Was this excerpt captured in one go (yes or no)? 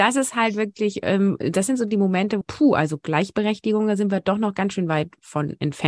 no